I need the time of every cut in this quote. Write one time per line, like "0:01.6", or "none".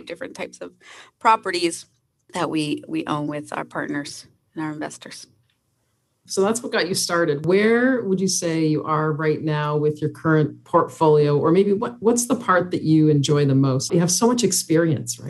0:13.9